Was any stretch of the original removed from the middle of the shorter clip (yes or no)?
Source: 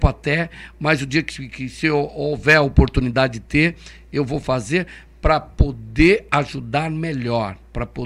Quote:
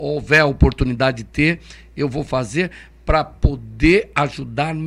no